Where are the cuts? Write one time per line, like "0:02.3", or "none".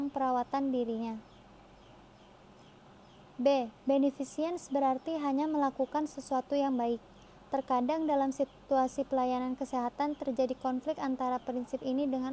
0:03.7